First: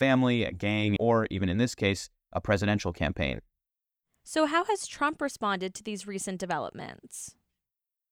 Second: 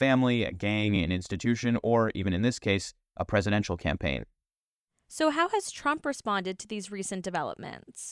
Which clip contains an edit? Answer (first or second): first